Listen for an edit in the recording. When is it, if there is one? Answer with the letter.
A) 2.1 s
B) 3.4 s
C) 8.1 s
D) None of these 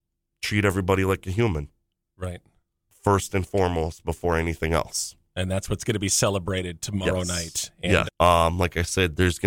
C